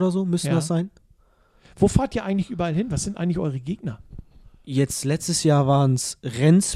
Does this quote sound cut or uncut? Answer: uncut